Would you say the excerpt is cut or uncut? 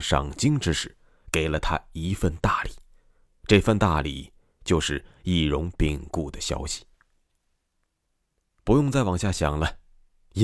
uncut